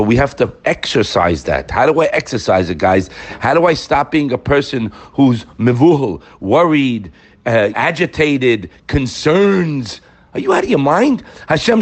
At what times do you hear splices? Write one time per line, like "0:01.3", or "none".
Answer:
0:07.7